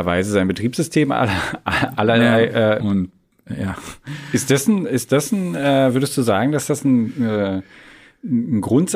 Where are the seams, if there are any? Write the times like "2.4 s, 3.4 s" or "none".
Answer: 2.8 s